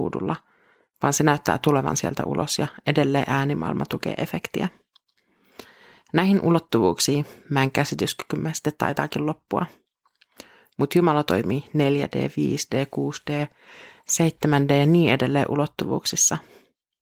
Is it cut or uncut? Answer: uncut